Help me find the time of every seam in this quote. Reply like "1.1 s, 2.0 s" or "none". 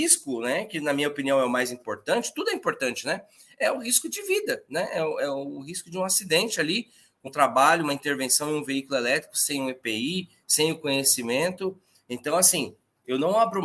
7.3 s